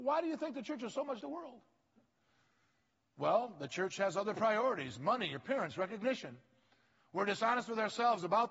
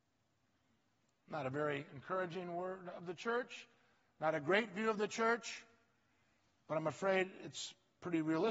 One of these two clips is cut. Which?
first; 1 cut; at 1.2 s

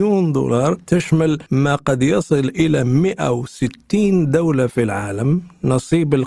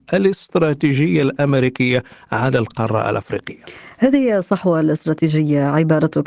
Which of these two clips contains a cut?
first; 1 cut; at 1.5 s

